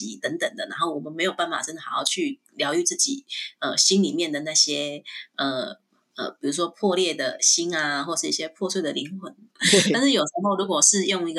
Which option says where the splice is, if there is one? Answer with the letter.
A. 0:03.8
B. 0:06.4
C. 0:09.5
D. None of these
C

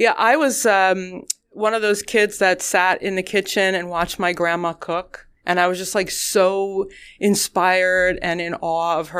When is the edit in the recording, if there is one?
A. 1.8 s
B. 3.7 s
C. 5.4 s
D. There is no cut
C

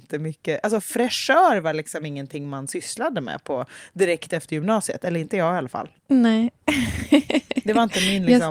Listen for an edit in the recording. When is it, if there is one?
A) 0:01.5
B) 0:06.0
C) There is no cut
B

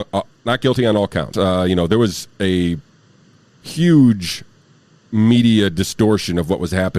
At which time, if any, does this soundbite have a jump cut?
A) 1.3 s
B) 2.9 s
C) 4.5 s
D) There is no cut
A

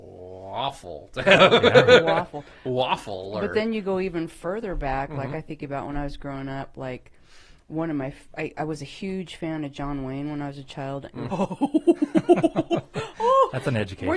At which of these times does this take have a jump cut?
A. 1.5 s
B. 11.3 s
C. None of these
B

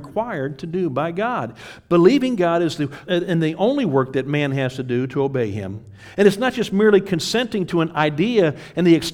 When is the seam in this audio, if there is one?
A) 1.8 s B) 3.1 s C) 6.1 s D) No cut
B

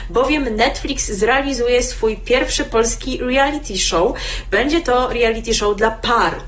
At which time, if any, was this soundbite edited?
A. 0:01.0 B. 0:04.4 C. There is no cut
C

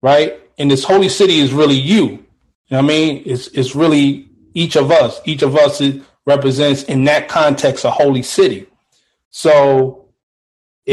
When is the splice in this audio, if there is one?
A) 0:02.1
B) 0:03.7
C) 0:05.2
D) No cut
D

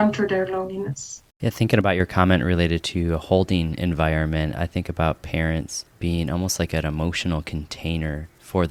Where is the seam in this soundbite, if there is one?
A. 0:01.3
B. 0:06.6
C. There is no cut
A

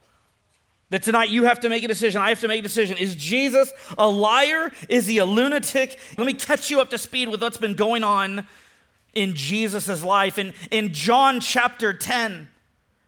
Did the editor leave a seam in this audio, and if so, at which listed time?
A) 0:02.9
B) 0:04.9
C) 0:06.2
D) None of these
C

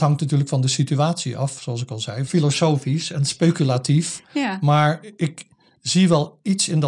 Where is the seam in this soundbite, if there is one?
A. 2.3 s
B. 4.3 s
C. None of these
A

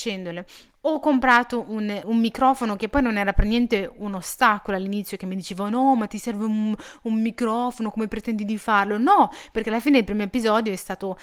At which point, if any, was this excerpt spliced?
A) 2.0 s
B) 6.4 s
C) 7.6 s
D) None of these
A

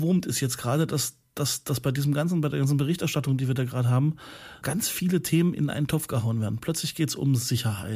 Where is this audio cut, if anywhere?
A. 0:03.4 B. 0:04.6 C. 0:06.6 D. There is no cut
B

